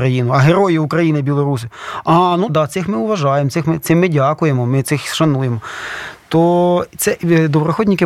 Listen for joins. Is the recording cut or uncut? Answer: cut